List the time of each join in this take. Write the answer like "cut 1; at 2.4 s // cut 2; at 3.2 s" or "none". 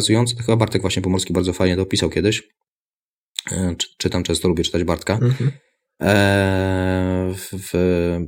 none